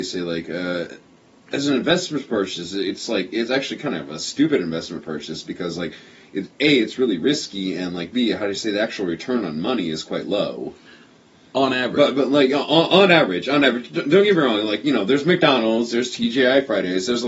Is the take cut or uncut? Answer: uncut